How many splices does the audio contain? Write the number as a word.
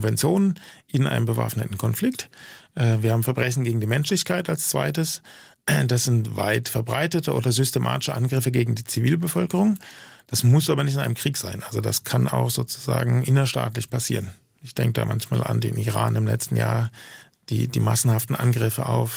zero